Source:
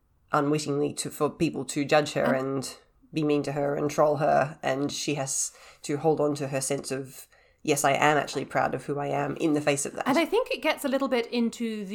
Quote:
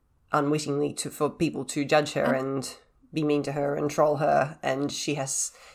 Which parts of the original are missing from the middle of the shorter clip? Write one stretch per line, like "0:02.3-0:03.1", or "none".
none